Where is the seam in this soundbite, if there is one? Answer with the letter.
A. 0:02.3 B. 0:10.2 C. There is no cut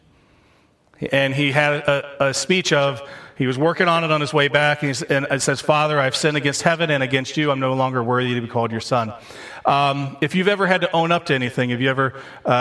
C